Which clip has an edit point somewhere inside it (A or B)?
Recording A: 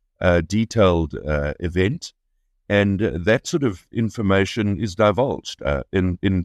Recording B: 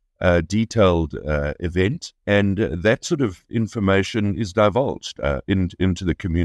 B